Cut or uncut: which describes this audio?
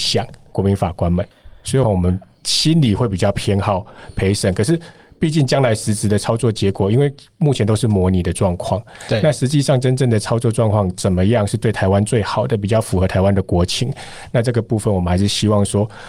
cut